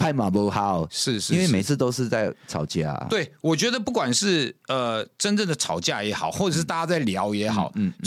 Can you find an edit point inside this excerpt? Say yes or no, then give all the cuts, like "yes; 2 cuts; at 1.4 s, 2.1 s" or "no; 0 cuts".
no; 0 cuts